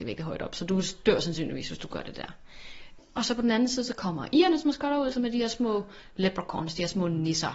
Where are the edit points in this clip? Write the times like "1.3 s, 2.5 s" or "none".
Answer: none